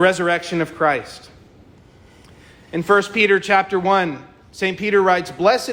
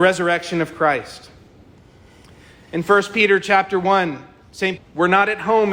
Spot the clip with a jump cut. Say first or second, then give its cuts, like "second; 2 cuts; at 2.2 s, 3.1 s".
second; 1 cut; at 4.8 s